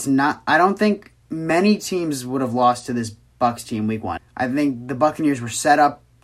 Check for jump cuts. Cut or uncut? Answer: cut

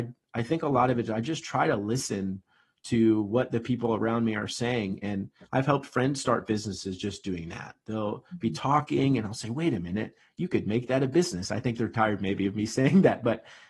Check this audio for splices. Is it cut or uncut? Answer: uncut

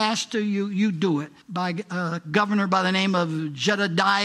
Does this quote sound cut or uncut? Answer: cut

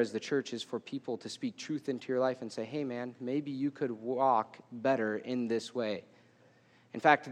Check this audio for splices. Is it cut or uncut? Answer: uncut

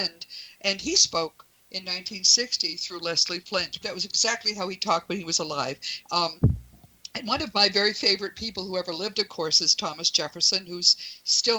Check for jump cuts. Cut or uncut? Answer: cut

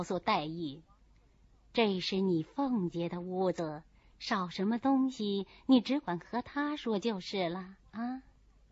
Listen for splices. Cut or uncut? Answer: cut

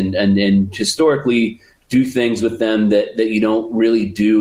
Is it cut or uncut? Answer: uncut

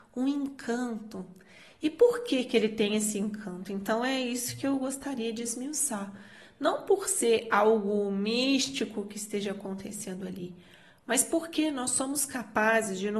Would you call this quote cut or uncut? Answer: uncut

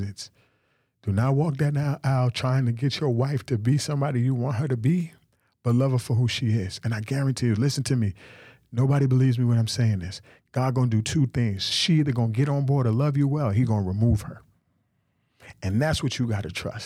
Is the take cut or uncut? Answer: uncut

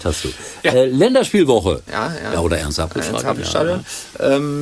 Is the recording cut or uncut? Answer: cut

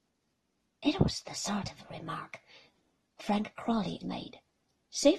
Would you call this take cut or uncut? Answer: cut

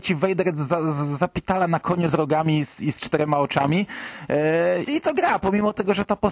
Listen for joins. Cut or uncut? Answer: cut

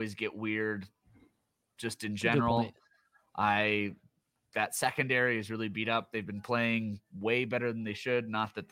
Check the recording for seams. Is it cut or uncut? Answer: uncut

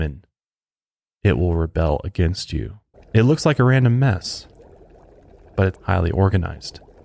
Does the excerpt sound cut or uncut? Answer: cut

